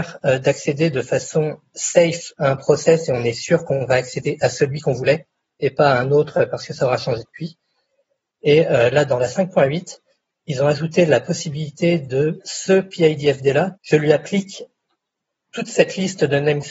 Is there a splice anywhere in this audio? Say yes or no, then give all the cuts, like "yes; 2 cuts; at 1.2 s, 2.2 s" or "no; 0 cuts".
yes; 2 cuts; at 12.4 s, 13.8 s